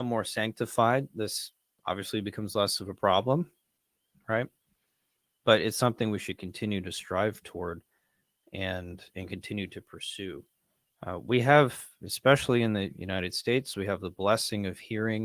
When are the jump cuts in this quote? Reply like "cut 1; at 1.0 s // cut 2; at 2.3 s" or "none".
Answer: none